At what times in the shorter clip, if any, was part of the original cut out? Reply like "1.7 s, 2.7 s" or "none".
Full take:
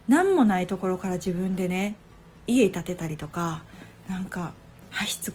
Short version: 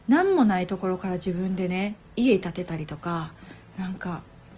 2.0 s